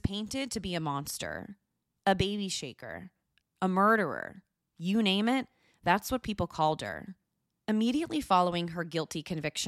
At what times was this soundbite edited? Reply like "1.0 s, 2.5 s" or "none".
3.4 s, 7.6 s